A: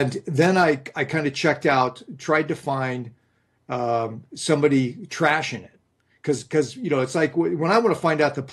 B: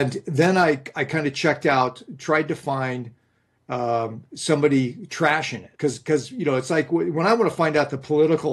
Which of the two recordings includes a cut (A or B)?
B